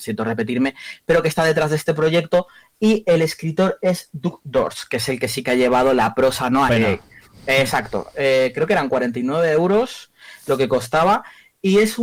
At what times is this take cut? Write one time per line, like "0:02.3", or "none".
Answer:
0:06.7